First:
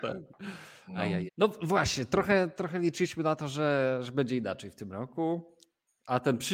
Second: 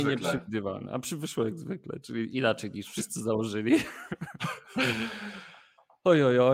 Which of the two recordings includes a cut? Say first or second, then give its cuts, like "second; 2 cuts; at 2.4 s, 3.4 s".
first; 1 cut; at 1.3 s